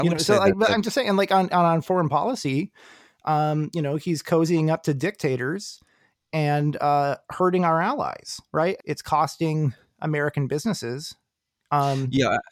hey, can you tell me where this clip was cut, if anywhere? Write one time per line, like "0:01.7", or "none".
0:08.8